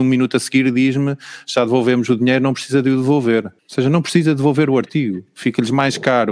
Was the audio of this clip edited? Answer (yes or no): yes